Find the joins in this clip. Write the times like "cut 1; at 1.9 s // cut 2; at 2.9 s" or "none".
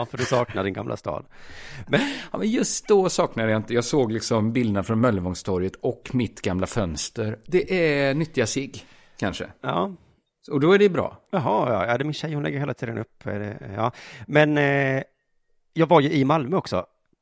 cut 1; at 7.4 s // cut 2; at 11.3 s